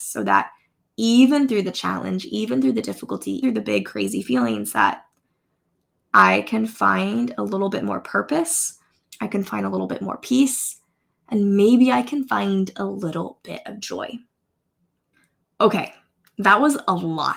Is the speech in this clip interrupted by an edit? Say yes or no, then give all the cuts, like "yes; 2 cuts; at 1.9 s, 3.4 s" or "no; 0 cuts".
yes; 1 cut; at 3.4 s